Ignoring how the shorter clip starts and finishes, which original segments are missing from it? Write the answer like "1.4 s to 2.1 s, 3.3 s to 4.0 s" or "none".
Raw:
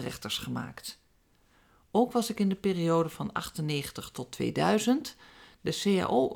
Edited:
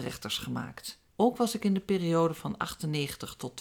1.1 s to 1.8 s